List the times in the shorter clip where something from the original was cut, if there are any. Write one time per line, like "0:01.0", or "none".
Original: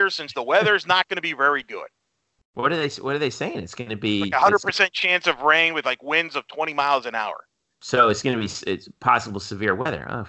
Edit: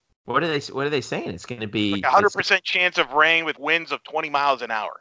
0:03.5